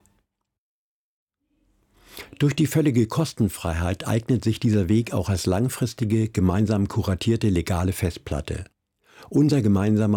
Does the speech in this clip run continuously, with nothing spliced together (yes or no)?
yes